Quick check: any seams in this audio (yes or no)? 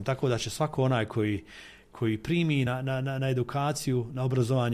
no